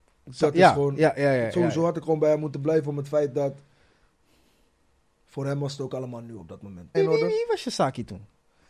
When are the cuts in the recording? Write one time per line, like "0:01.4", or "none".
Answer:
0:06.9